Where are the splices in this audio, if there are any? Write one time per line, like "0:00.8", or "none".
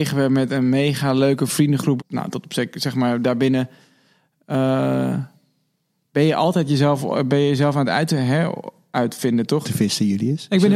0:02.0
0:09.6